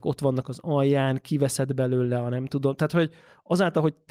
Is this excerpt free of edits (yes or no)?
yes